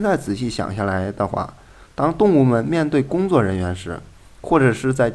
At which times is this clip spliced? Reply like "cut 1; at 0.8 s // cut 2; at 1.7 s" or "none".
none